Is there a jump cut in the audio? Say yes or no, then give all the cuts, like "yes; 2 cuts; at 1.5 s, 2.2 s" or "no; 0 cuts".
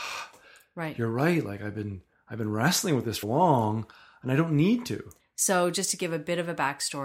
yes; 2 cuts; at 3.2 s, 5.2 s